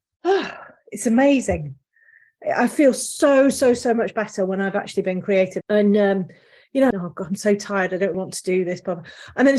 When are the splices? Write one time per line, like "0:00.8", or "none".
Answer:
0:05.6
0:06.9
0:08.1